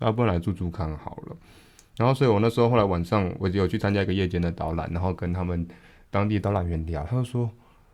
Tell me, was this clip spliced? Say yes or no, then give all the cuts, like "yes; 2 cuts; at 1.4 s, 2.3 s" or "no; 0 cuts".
no; 0 cuts